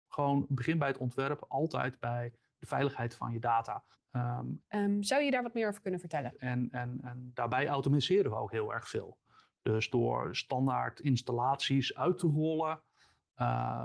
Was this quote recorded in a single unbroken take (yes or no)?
no